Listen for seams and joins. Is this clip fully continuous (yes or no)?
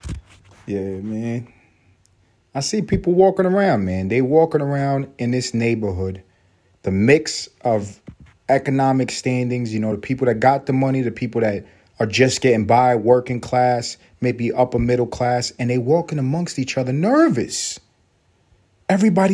yes